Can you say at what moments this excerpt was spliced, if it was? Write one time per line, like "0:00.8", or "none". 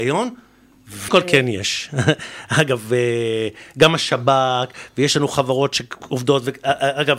0:01.1